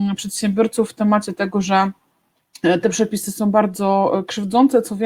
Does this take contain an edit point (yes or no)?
no